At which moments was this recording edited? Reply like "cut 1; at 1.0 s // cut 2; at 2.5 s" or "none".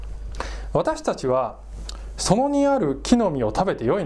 none